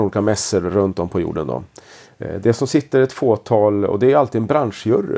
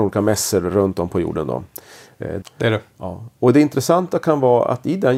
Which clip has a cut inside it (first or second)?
second